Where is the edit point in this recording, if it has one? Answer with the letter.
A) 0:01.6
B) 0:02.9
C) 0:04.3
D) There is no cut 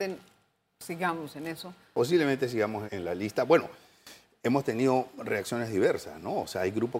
B